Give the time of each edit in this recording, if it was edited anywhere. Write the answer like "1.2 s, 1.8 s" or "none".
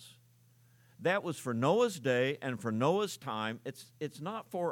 none